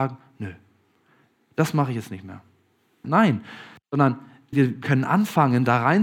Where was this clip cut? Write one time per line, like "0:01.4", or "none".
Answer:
0:03.0
0:04.5